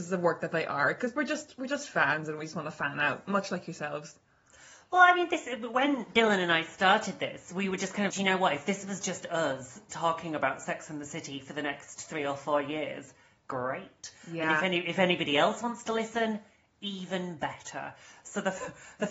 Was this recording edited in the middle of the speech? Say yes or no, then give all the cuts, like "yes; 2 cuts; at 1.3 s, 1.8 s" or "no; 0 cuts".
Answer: yes; 1 cut; at 8.1 s